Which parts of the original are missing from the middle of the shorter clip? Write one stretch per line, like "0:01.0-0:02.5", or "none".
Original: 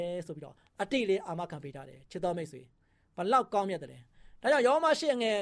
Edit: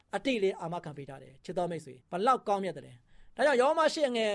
0:02.7-0:03.1